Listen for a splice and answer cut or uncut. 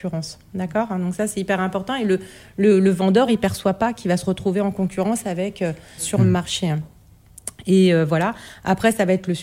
cut